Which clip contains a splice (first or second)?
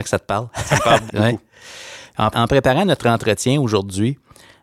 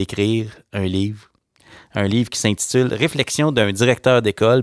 first